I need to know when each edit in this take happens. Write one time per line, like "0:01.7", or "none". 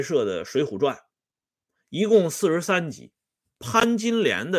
0:03.4